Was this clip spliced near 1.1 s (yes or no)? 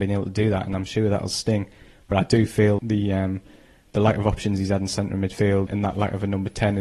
no